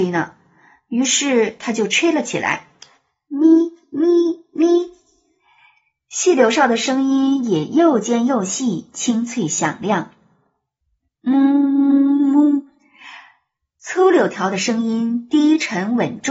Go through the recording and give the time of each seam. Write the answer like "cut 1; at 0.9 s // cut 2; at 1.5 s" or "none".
none